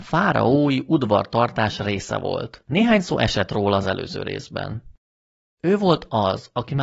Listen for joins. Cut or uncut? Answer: uncut